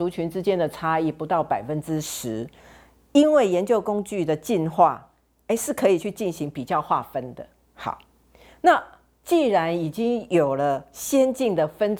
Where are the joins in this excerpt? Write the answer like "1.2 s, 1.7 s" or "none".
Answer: none